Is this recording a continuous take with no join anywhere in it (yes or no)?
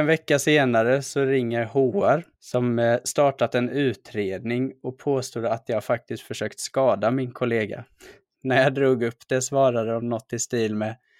no